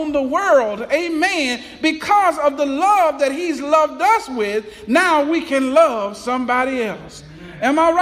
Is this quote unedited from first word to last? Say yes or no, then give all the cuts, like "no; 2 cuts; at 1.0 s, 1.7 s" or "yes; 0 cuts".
yes; 0 cuts